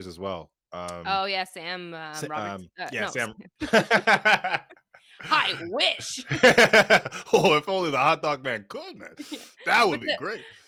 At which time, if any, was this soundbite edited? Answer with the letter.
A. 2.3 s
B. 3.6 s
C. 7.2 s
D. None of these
B